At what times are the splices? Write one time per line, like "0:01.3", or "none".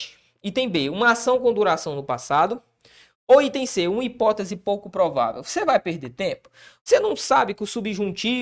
none